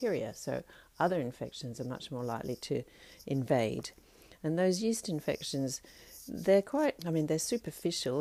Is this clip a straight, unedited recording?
no; 1 cut; at 7.0 s

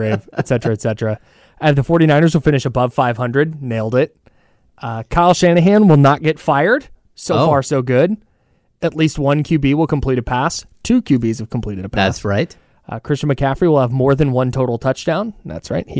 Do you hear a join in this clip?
no; 0 cuts

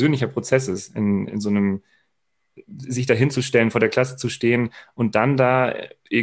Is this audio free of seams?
no; 1 cut; at 1.3 s

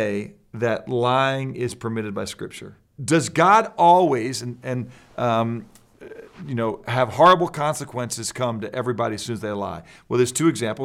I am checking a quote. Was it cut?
yes; 1 cut; at 3.0 s

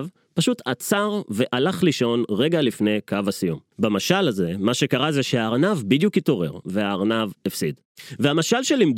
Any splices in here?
yes; 2 cuts; at 3.7 s, 6.6 s

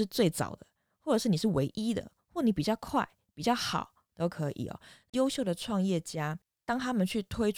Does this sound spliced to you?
yes; 1 cut; at 4.1 s

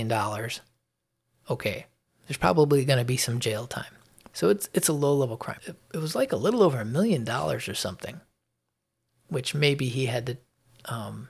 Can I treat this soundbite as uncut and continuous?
no; 2 cuts; at 4.3 s, 5.6 s

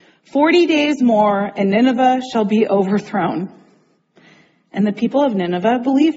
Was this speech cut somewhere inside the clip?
no; 0 cuts

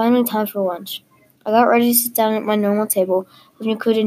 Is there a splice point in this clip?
no; 0 cuts

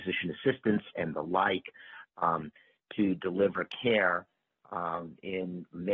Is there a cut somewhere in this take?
yes; 1 cut; at 0.9 s

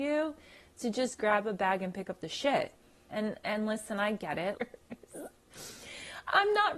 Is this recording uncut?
no; 2 cuts; at 3.1 s, 4.5 s

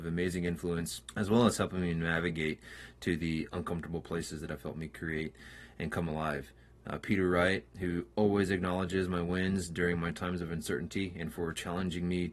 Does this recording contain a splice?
no; 0 cuts

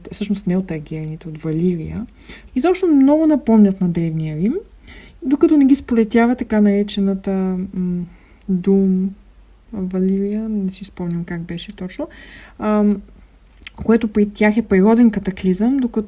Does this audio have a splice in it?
yes; 1 cut; at 2.5 s

